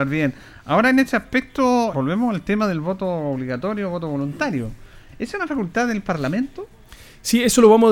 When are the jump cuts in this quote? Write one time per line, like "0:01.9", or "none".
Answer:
0:01.9